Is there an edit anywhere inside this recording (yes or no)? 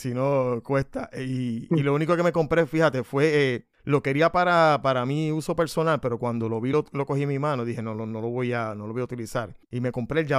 no